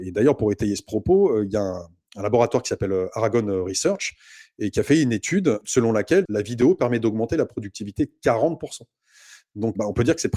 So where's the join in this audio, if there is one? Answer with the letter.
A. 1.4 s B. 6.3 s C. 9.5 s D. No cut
B